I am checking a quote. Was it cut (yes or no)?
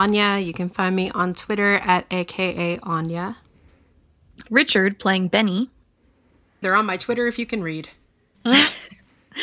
yes